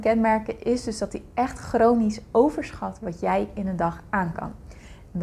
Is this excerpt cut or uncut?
uncut